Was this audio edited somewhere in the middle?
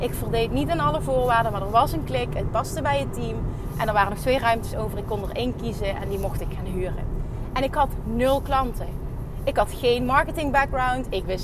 no; 0 cuts

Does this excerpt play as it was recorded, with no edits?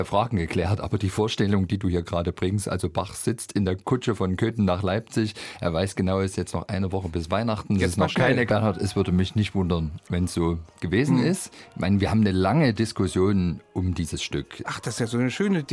no; 2 cuts; at 8.5 s, 14.6 s

